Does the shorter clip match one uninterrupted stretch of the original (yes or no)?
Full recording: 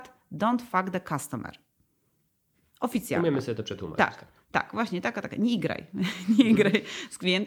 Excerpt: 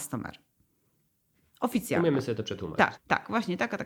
no